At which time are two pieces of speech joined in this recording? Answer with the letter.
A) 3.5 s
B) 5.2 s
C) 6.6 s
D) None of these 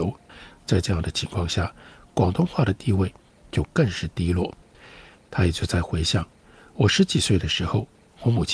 D